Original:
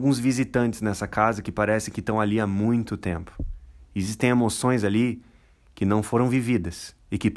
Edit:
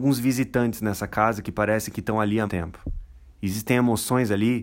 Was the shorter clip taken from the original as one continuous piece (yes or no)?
no